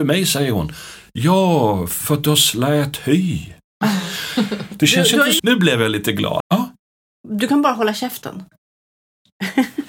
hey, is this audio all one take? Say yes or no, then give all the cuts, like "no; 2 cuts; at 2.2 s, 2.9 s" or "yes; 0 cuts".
no; 2 cuts; at 5.4 s, 6.4 s